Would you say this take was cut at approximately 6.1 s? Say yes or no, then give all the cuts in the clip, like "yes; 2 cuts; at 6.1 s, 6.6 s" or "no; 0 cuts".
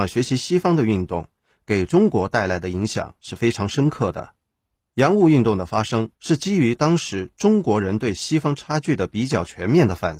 yes; 2 cuts; at 4.8 s, 6.1 s